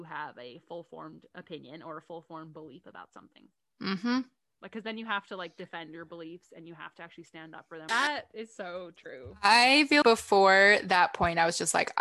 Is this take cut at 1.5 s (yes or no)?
no